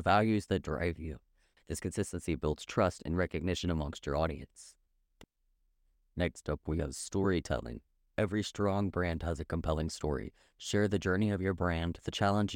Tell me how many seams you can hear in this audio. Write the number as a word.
one